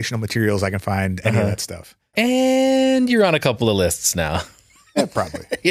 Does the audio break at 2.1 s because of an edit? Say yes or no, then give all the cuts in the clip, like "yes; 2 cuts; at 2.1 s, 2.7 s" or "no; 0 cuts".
yes; 1 cut; at 2.1 s